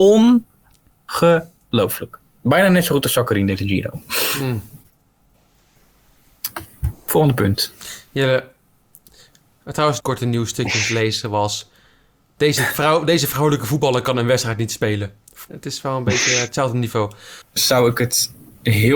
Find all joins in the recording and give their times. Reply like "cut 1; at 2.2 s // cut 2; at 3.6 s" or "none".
cut 1; at 10.0 s // cut 2; at 15.5 s // cut 3; at 17.4 s